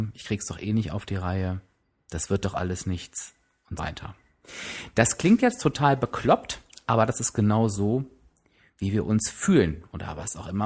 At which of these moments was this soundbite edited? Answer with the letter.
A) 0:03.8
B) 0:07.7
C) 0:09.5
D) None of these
A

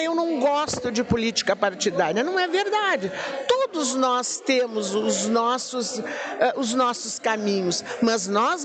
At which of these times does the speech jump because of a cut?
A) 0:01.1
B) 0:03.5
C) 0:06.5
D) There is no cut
D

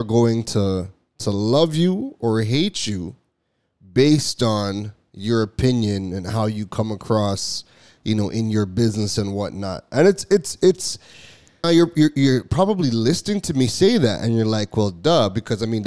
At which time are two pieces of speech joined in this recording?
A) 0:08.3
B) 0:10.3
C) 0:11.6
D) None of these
C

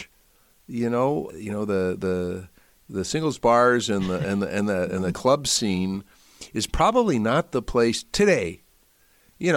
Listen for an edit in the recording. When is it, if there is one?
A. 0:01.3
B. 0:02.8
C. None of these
A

